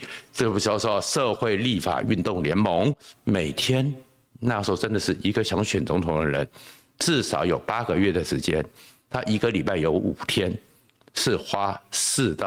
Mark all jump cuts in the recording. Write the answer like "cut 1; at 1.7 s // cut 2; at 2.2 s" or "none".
cut 1; at 3.1 s